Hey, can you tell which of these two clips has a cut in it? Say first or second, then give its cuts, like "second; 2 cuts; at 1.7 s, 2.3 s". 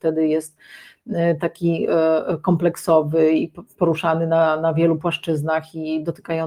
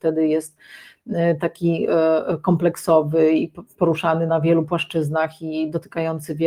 second; 1 cut; at 4.3 s